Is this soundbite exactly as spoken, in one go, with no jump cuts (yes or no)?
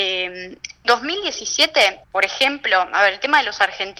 no